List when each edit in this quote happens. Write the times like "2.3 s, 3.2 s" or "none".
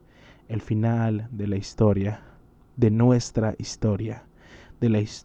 none